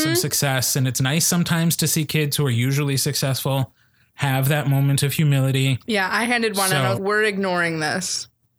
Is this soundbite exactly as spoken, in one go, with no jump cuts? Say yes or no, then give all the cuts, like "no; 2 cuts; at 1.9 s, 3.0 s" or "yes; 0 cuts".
no; 2 cuts; at 5.9 s, 6.9 s